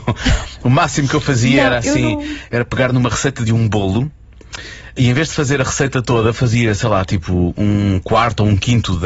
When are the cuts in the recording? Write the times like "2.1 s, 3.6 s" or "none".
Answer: 5.0 s